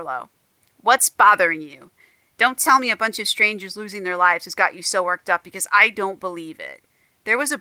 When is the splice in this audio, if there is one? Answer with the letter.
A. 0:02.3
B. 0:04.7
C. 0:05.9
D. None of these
D